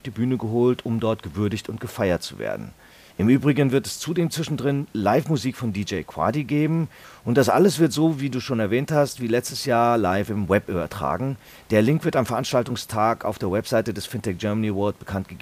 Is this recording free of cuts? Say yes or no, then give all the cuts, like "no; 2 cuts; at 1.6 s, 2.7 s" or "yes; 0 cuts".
yes; 0 cuts